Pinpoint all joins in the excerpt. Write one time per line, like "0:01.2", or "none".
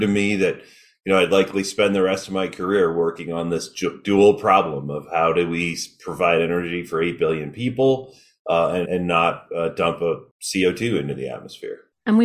0:08.8
0:10.3